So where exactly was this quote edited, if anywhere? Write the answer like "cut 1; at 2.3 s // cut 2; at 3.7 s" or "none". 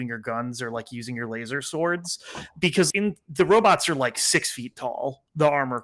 cut 1; at 2.9 s